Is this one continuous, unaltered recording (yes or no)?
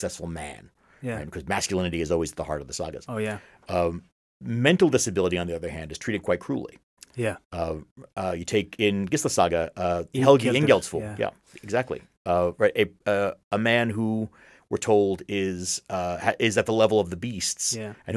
yes